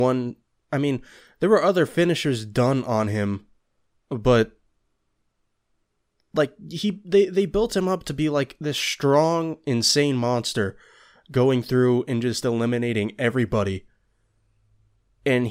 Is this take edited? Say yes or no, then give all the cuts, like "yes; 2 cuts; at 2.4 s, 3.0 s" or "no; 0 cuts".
no; 0 cuts